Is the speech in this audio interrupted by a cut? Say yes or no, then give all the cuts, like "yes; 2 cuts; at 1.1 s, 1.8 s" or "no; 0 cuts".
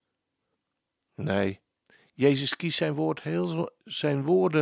no; 0 cuts